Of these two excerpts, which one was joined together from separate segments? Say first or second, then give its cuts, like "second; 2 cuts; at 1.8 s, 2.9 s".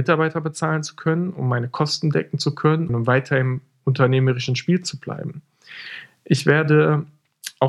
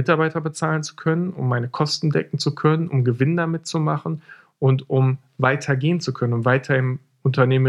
first; 1 cut; at 2.9 s